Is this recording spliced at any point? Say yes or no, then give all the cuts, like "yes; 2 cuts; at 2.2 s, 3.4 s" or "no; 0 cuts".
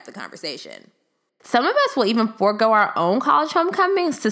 yes; 1 cut; at 1.4 s